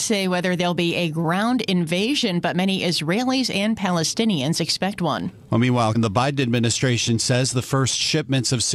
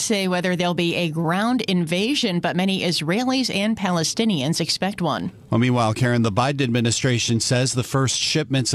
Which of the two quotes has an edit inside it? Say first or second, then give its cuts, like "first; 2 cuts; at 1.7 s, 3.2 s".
first; 1 cut; at 5.9 s